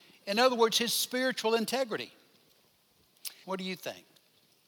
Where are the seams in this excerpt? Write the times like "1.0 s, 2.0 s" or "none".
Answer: 3.4 s